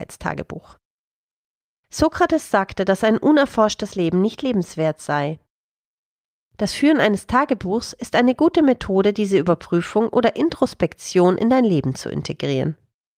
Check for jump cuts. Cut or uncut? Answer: uncut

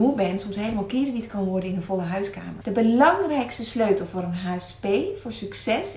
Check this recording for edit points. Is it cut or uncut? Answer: cut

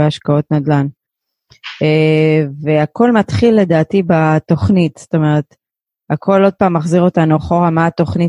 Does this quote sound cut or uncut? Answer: uncut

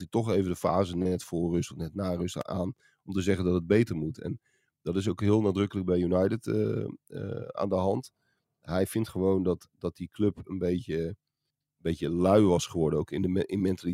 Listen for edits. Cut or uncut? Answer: uncut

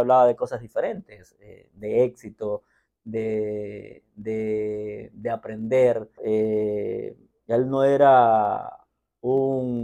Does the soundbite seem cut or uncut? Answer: cut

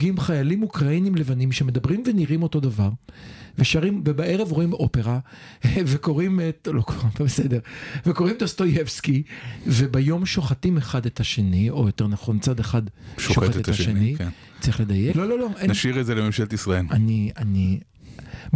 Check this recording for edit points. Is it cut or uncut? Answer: cut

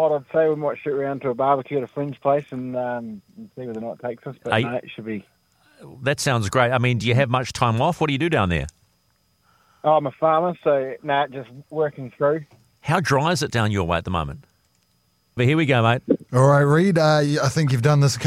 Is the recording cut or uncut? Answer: cut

